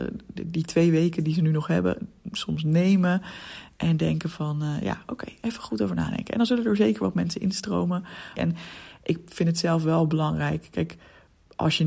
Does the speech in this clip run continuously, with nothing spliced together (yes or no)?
no